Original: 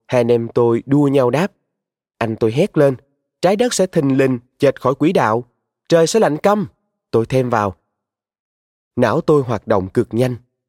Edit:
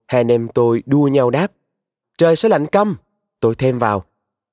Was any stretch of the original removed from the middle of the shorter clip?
yes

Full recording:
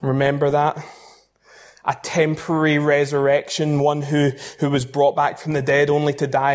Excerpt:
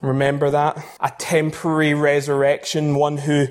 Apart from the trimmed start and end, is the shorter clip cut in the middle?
yes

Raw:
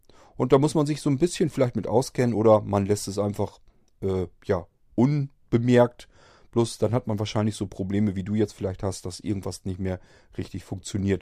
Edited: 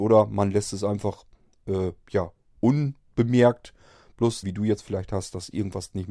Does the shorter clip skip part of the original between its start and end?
yes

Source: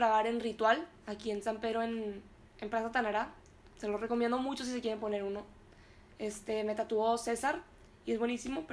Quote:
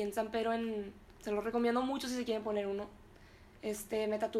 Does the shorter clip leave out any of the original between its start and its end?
yes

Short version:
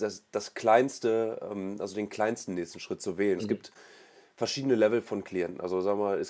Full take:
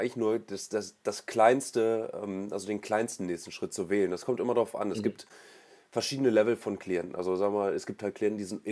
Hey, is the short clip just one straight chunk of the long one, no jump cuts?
no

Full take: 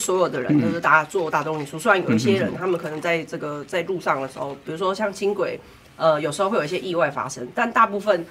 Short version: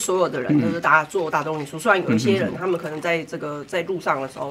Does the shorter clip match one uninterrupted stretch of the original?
yes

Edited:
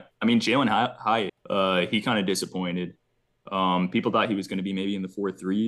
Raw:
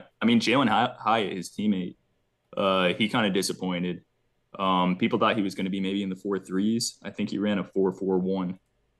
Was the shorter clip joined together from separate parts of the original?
yes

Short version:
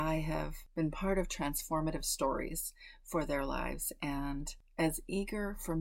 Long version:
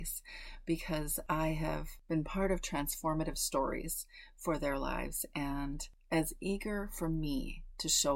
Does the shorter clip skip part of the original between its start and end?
no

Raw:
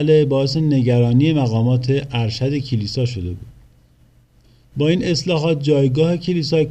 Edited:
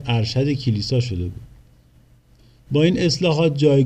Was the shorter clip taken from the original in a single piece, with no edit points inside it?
yes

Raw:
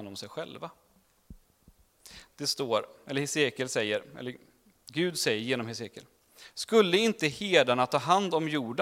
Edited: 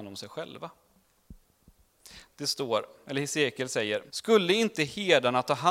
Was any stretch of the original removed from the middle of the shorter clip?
yes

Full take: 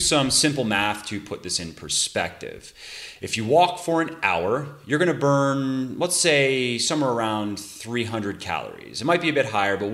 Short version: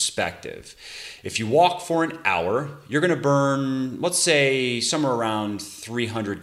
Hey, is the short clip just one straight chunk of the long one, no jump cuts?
yes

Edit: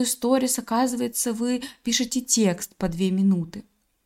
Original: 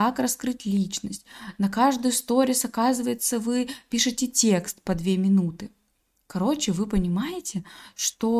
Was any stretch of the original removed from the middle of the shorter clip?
no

